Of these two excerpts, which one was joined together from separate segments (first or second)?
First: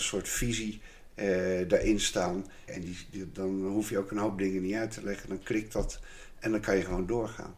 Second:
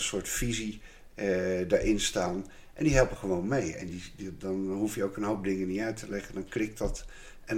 first